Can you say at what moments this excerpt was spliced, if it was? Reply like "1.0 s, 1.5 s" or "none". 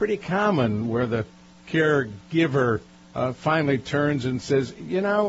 none